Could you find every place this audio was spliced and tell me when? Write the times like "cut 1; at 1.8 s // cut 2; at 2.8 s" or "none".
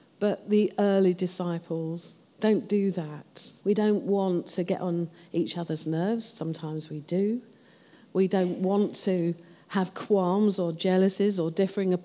cut 1; at 3.6 s